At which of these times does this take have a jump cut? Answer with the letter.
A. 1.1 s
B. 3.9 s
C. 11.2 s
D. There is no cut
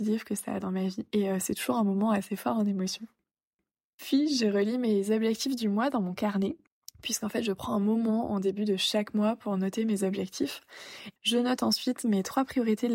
C